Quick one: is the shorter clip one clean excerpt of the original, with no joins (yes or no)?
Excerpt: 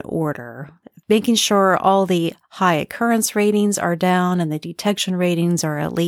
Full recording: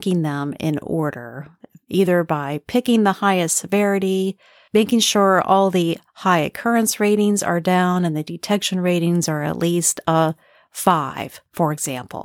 no